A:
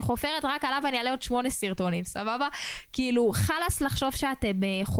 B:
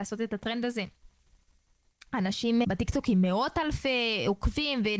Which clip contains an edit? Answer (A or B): B